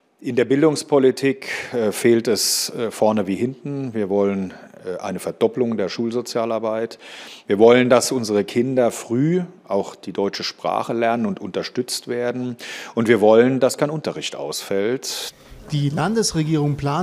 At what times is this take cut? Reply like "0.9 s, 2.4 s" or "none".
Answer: none